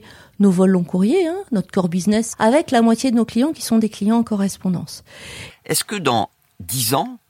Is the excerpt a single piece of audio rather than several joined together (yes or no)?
no